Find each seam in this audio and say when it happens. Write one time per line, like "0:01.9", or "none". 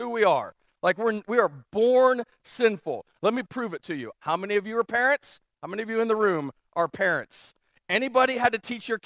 0:01.2
0:04.2